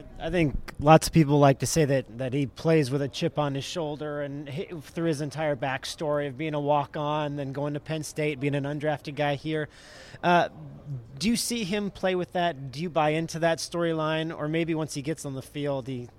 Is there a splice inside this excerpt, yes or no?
no